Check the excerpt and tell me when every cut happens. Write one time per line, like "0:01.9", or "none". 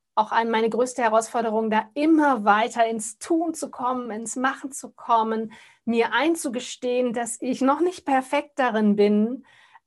none